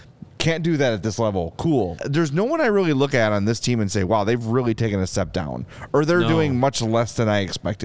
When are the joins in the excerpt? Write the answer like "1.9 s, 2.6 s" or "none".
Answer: 2.0 s